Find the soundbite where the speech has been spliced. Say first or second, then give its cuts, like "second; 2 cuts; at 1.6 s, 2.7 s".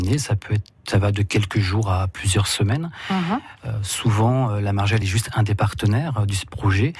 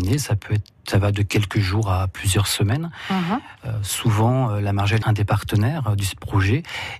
second; 1 cut; at 5.0 s